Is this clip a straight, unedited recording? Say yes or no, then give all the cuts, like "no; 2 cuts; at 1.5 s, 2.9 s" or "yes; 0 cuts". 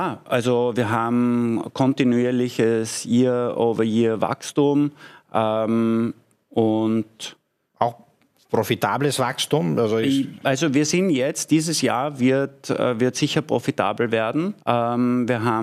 no; 1 cut; at 14.6 s